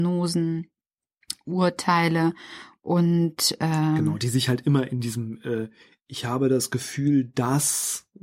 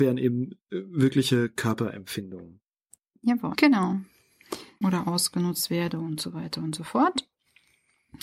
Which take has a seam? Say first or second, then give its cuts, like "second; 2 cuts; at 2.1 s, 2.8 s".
second; 2 cuts; at 3.5 s, 4.8 s